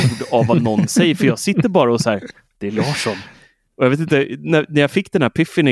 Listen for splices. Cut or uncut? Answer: uncut